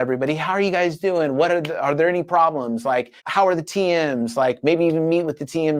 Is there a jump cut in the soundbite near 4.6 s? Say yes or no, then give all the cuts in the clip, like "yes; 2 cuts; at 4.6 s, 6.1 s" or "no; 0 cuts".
no; 1 cut; at 3.2 s